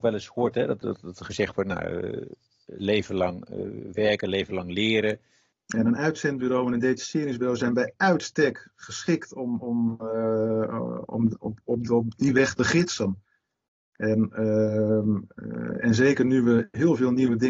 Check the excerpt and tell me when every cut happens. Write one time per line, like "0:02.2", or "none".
0:05.5

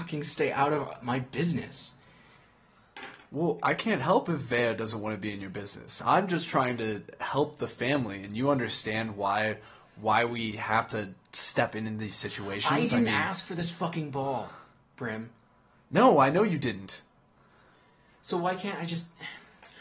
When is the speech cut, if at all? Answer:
none

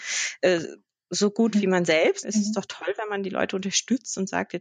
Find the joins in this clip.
0:02.2

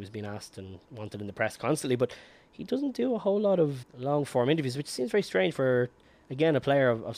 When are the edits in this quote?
0:03.8

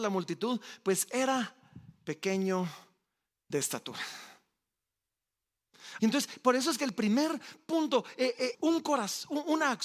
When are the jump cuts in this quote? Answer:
0:06.0
0:08.5

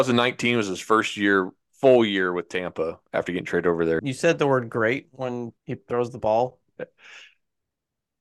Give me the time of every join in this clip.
0:04.0
0:05.6
0:06.8

